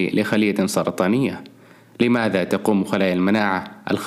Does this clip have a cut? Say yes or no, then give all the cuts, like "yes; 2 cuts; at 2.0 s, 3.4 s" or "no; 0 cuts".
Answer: no; 0 cuts